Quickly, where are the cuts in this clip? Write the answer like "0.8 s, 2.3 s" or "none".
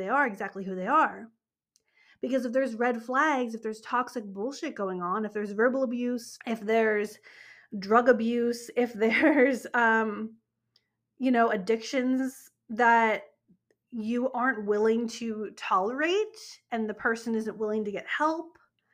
6.4 s